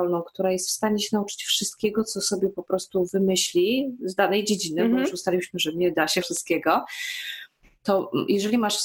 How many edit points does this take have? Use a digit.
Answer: 1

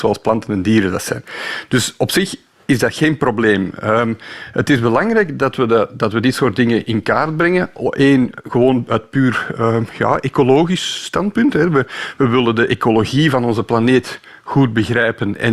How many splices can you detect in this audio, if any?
0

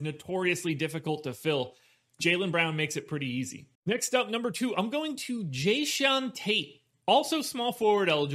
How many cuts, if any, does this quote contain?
1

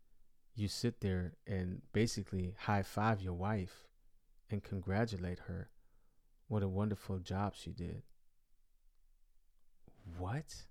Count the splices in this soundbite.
0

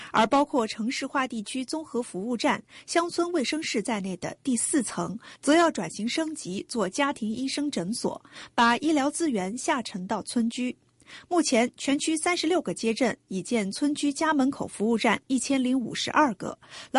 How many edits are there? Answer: 0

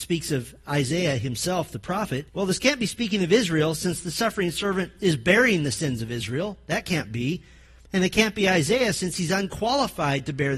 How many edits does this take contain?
1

